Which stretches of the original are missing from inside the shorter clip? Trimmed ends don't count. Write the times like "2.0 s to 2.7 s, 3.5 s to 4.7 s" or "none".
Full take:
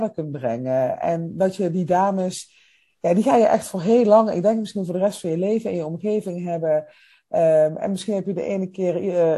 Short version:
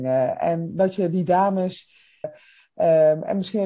2.9 s to 6.8 s